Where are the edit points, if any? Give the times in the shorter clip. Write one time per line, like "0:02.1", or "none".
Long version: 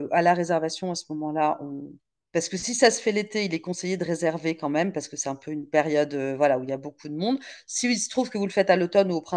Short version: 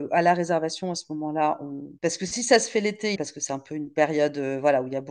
0:02.0
0:03.2